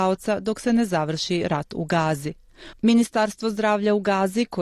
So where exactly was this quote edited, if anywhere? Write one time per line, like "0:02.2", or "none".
0:02.7